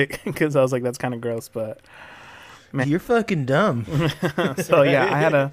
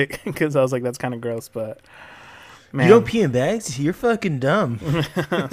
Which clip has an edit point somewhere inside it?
first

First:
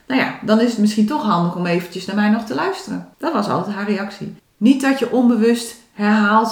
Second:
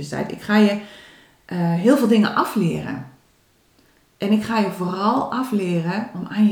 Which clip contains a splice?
first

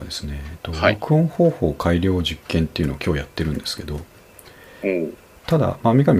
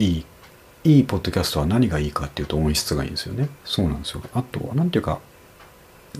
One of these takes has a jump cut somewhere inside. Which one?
second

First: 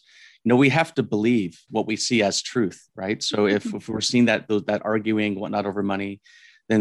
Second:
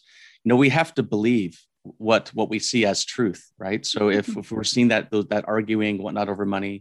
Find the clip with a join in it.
first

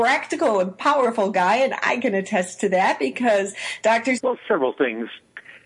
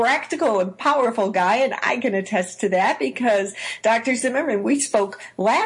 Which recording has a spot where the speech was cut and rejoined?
first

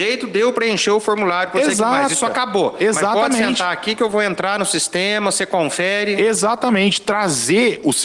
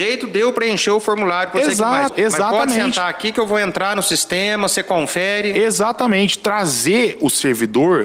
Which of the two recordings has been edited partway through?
second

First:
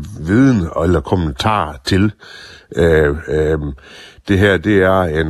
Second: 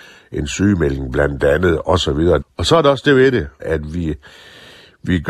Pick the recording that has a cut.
second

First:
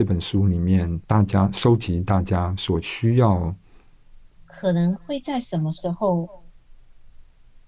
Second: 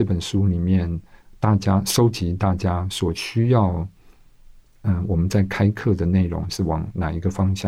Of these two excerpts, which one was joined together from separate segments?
first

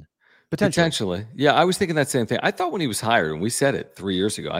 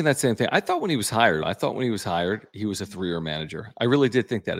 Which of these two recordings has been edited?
second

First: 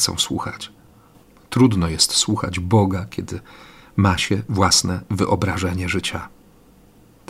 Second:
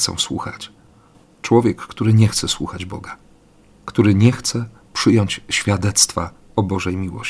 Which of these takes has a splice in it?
second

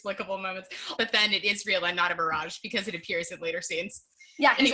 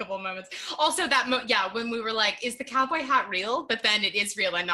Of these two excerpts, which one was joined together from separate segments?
first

